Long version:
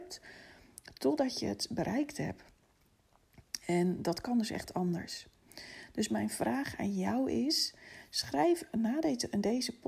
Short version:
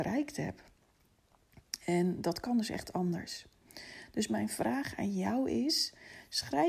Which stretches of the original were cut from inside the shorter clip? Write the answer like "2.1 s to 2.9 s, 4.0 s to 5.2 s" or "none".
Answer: none